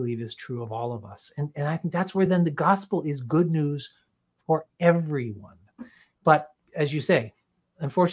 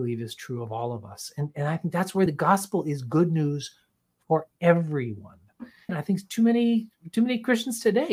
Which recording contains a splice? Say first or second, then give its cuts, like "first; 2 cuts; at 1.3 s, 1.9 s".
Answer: second; 2 cuts; at 2.3 s, 5.9 s